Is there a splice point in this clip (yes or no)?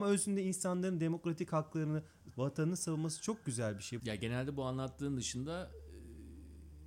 yes